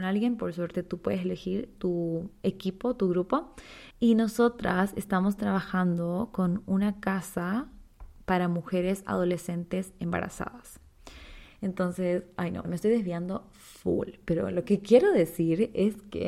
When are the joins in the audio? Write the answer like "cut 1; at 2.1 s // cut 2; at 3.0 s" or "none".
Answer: cut 1; at 3.9 s // cut 2; at 11.5 s // cut 3; at 12.6 s